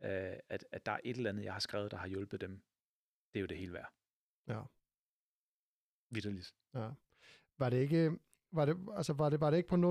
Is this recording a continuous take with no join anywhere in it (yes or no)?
yes